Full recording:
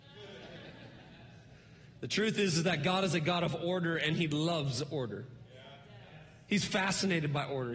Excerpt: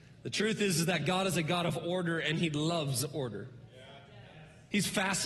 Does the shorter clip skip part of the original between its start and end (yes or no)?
no